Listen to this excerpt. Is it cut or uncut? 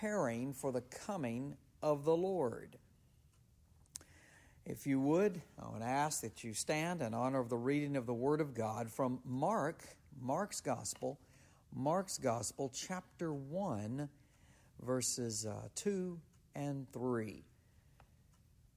uncut